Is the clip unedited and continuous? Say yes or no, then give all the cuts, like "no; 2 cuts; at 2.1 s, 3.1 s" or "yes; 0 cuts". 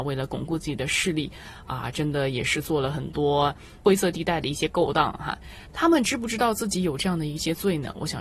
no; 1 cut; at 5.6 s